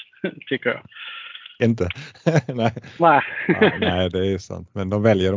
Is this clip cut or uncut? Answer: uncut